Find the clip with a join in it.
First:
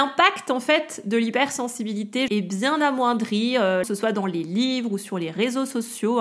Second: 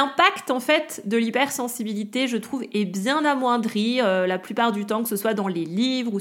first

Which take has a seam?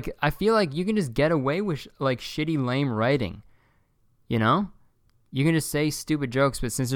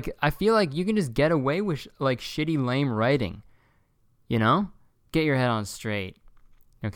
second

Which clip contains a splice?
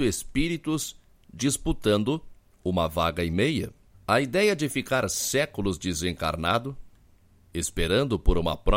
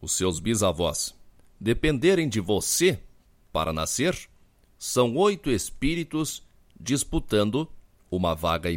first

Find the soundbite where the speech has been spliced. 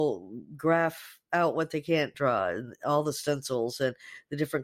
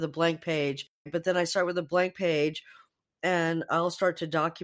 second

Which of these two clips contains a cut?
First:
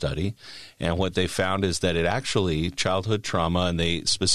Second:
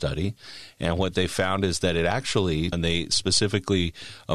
second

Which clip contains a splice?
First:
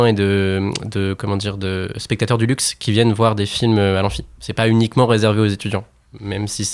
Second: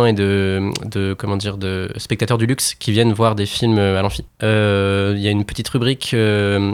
second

